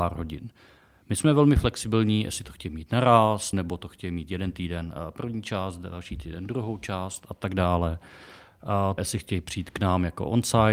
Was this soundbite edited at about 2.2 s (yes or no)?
no